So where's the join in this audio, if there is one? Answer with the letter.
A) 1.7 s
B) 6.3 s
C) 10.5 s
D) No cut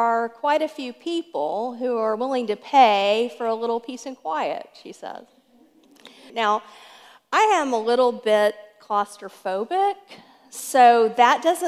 B